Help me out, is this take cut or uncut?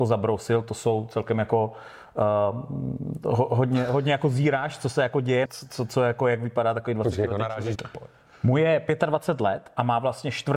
cut